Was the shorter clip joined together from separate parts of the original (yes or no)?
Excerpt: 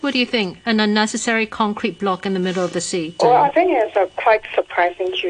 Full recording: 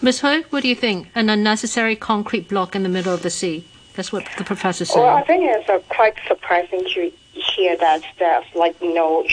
yes